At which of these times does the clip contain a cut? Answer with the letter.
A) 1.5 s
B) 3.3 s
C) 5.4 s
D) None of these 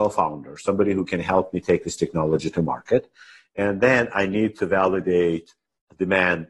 D